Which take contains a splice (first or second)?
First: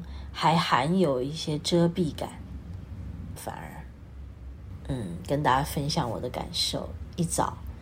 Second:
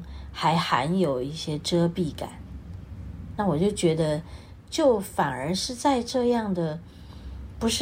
first